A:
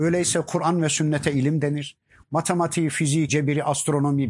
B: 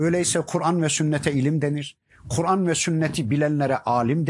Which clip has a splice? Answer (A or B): A